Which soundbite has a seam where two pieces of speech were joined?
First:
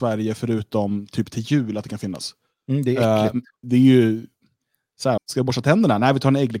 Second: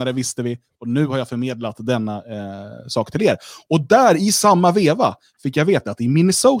first; 2 cuts; at 3.6 s, 5.2 s

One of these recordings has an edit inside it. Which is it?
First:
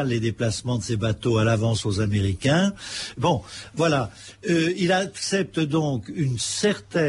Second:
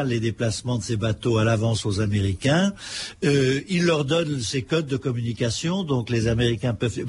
first; 1 cut; at 3.2 s

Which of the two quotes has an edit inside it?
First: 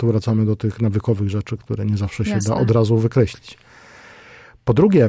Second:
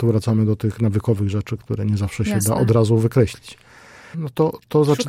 second; 1 cut; at 4.1 s

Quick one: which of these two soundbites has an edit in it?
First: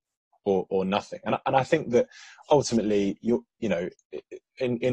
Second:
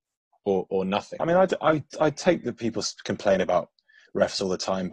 second; 1 cut; at 1.2 s

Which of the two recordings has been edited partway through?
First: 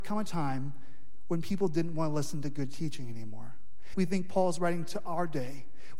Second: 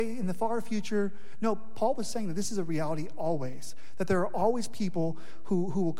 first; 1 cut; at 3.9 s

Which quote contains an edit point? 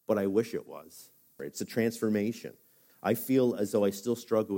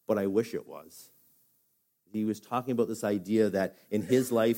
first; 2 cuts; at 1.4 s, 2.9 s

